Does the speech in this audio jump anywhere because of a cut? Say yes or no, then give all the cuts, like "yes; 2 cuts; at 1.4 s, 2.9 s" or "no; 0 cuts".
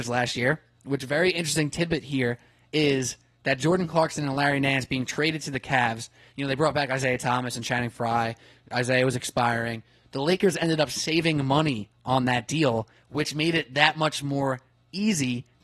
no; 0 cuts